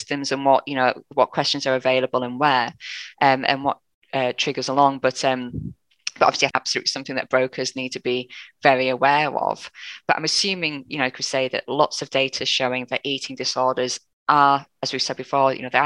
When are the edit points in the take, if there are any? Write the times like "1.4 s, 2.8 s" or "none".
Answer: 6.5 s